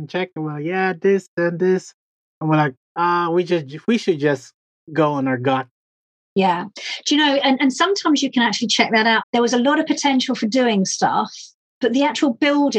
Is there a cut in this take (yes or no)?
yes